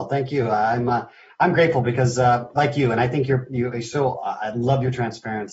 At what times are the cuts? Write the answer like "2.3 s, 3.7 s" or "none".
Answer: none